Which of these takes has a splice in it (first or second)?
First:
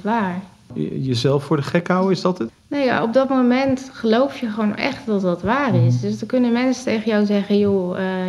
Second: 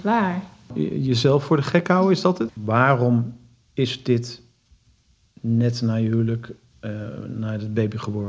second